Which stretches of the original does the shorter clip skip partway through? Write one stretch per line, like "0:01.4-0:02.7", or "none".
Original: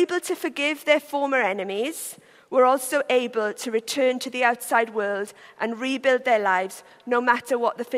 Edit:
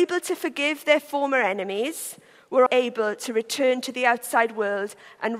0:02.7-0:03.0

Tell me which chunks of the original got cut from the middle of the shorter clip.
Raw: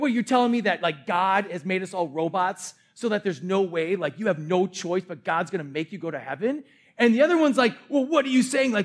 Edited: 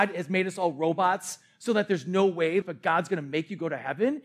0:04.0-0:05.0

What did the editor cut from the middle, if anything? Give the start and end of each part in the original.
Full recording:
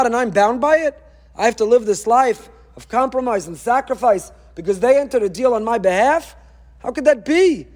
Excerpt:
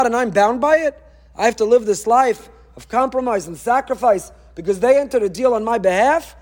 none

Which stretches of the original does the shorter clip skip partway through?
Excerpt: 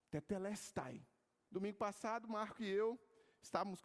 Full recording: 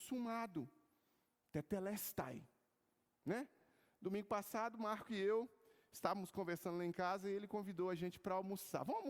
0:02.9-0:04.0

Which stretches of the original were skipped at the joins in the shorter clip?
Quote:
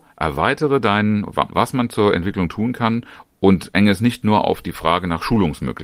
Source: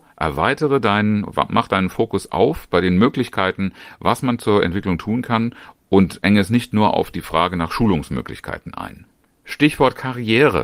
0:01.5-0:04.0

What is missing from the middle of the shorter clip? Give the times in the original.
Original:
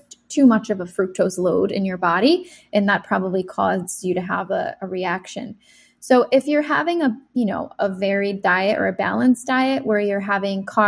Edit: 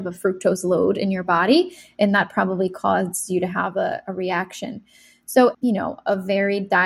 0:06.3-0:07.3

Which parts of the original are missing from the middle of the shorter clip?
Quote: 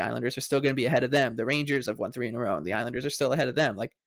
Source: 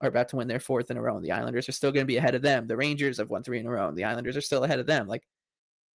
none

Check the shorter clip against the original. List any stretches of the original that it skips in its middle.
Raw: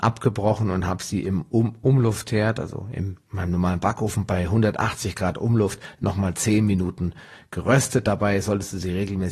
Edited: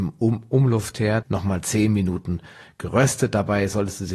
0:02.5-0:05.9

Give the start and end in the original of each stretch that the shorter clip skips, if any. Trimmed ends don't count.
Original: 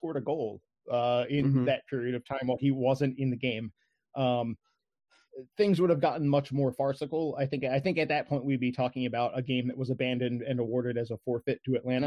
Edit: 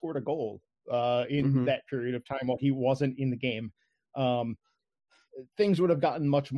none

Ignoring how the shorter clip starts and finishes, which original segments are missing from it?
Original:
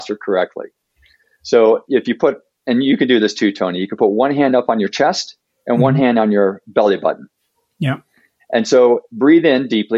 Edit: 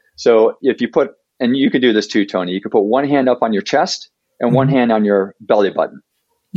none

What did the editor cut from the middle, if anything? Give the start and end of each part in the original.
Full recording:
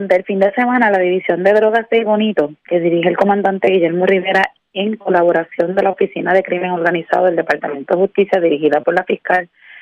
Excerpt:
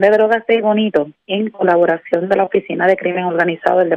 0:02.6-0:04.6

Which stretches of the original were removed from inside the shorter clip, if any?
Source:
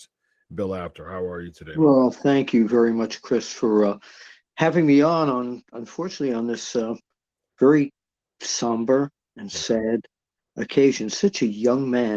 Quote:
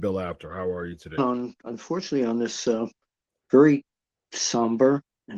0:01.7-0:05.3

